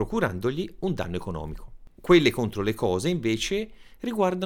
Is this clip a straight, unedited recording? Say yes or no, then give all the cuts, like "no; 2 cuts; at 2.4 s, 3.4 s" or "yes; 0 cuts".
yes; 0 cuts